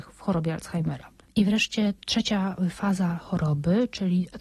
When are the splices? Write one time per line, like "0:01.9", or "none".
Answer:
0:01.2